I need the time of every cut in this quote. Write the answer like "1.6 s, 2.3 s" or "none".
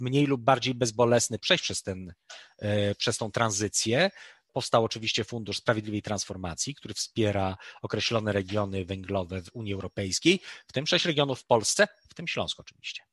4.5 s